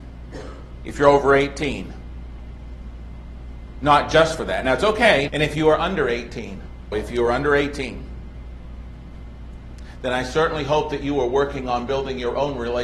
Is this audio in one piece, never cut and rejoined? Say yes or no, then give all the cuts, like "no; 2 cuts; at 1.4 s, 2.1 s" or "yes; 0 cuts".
no; 2 cuts; at 5.3 s, 6.9 s